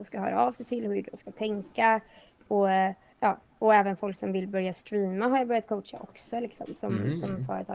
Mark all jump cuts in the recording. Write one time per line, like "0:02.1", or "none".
0:03.1